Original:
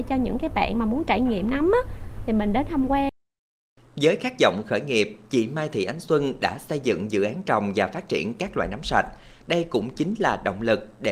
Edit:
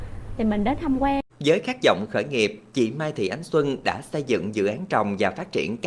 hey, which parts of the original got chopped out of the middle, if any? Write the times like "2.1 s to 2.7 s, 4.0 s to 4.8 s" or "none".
3.2 s to 3.9 s